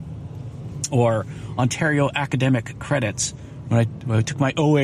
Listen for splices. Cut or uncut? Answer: uncut